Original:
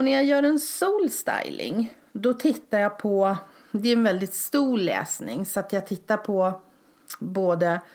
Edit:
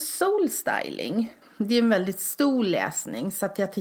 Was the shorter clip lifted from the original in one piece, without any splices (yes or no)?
no